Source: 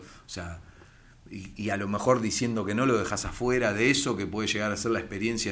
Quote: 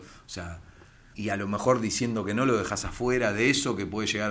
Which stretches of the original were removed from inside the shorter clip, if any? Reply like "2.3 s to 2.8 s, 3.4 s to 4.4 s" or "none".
1.1 s to 1.5 s